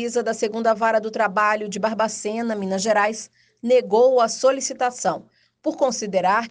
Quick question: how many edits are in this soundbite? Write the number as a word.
zero